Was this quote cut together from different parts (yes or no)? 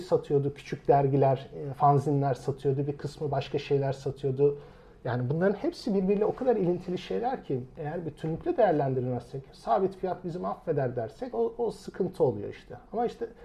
no